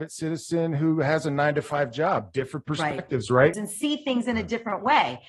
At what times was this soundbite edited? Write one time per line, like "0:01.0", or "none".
0:03.5

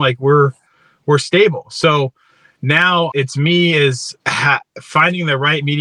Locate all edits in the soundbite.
0:03.1
0:04.2

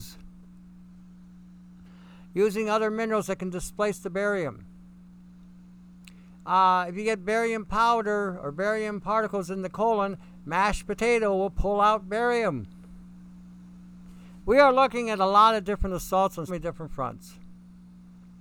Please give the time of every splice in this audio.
0:14.4
0:16.5

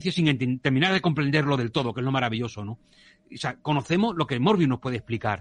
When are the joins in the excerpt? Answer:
none

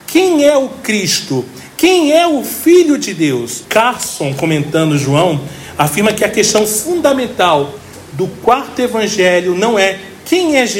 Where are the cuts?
0:03.6

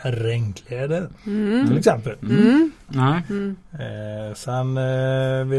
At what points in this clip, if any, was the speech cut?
0:02.9

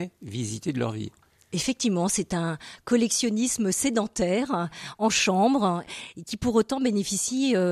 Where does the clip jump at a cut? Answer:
none

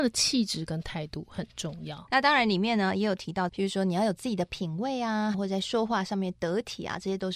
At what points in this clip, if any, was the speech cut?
0:02.1
0:03.5
0:05.3

